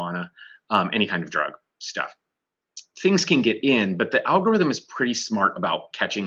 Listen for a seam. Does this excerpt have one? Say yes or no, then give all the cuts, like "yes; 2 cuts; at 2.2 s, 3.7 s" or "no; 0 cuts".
no; 0 cuts